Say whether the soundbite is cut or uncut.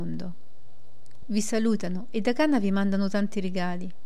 cut